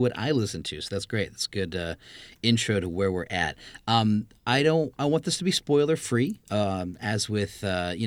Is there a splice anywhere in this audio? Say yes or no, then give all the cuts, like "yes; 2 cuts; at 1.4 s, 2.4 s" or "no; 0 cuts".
no; 0 cuts